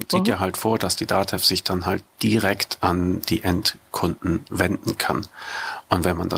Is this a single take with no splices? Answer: yes; 0 cuts

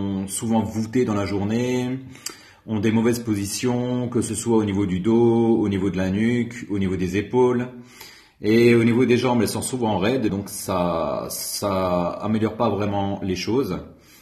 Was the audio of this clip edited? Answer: yes; 1 cut; at 10.3 s

